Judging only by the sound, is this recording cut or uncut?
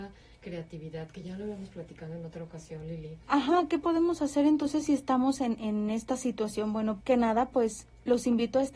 cut